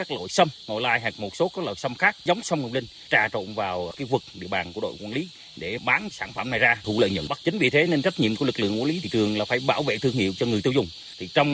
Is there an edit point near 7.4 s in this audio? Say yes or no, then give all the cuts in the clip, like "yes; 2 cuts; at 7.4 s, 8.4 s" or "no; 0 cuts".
yes; 1 cut; at 7.4 s